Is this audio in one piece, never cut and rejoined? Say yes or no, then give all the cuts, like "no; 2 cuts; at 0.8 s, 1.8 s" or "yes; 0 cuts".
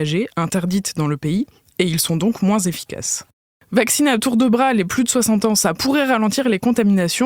yes; 0 cuts